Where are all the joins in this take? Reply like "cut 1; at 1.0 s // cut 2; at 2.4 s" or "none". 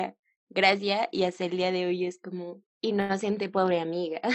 cut 1; at 2.6 s